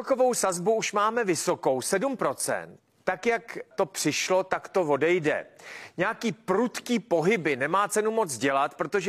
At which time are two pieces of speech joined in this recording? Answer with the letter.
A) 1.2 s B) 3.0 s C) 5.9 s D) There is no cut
B